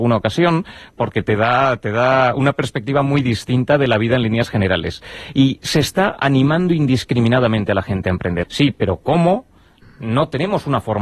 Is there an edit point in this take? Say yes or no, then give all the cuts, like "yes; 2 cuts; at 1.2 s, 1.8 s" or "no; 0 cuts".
yes; 1 cut; at 8.4 s